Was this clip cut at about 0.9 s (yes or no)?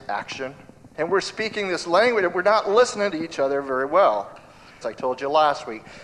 yes